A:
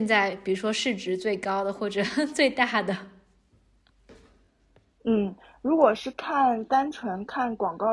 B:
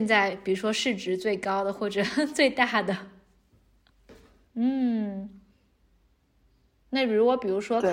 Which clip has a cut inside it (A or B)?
B